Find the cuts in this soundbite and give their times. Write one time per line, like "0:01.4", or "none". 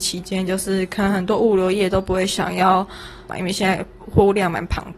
0:03.3